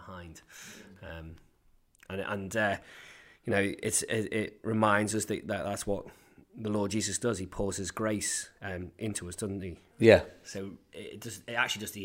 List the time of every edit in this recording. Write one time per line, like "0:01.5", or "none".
0:09.9